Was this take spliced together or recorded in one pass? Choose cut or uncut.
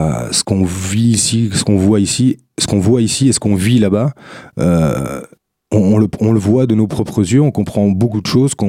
uncut